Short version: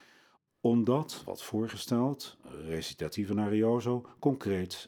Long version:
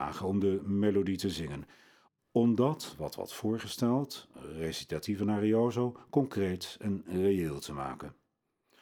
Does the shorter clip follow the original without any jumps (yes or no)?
no